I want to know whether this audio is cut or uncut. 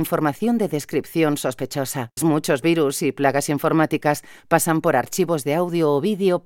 cut